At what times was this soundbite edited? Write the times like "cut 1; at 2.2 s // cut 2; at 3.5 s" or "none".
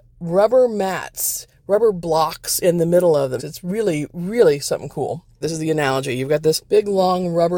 cut 1; at 3.4 s // cut 2; at 5.4 s